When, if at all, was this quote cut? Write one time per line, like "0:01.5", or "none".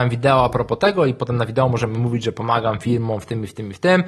none